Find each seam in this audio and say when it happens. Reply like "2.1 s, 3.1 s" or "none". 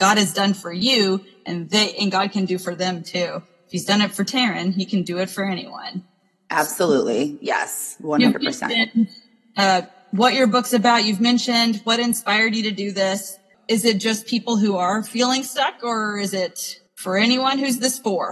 13.5 s, 16.9 s

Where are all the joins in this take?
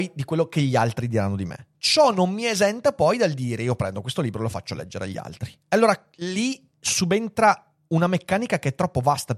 1.7 s, 5.6 s

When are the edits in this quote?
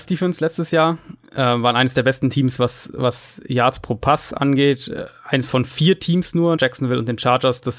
6.6 s

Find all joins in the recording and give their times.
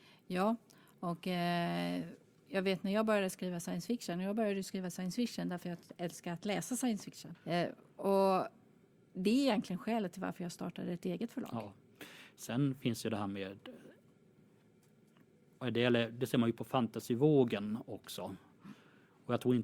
7.3 s

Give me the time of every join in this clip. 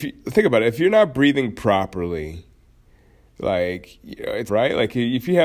4.5 s

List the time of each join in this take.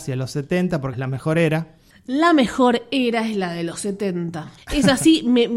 0.9 s, 4.6 s

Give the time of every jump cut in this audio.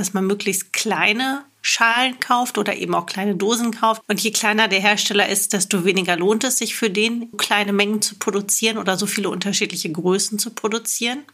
4.0 s, 7.3 s

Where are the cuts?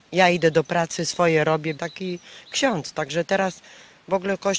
1.8 s

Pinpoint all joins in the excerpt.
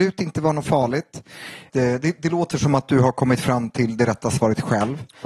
1.7 s

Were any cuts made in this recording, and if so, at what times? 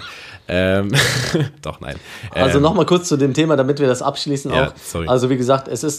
none

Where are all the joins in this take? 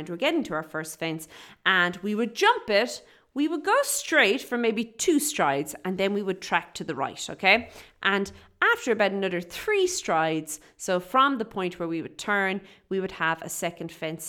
none

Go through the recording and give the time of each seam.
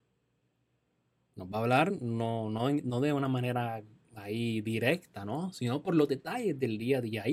none

